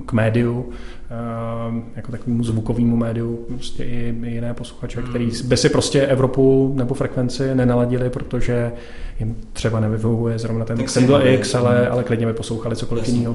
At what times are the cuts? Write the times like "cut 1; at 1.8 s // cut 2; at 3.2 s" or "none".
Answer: none